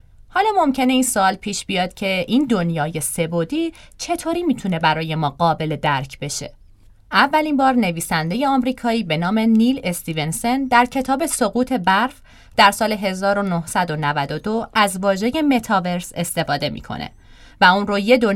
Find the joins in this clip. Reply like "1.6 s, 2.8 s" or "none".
7.0 s